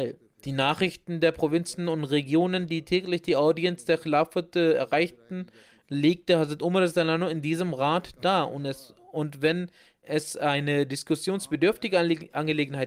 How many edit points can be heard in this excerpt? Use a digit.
0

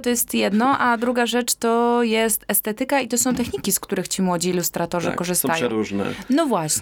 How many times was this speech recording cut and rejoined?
0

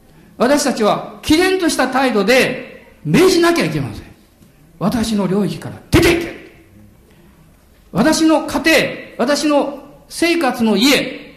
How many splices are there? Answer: 0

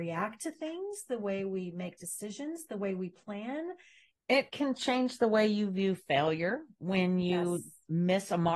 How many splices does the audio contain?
1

